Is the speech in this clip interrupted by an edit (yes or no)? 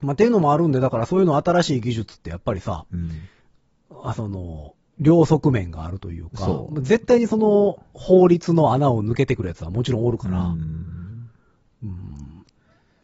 no